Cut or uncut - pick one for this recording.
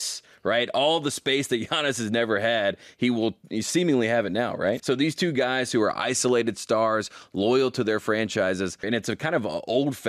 cut